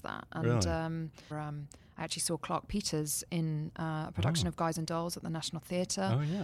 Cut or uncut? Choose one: cut